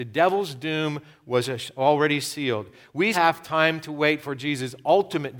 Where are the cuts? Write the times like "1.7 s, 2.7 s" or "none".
3.1 s